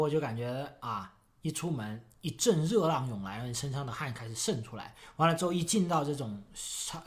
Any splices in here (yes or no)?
no